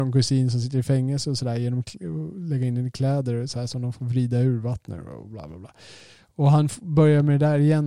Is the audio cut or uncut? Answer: uncut